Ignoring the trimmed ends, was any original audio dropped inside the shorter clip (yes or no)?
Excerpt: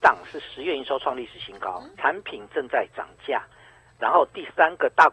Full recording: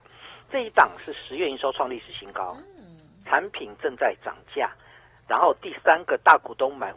yes